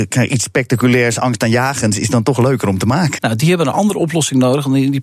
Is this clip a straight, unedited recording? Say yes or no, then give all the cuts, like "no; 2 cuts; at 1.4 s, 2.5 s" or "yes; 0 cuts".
no; 1 cut; at 3.2 s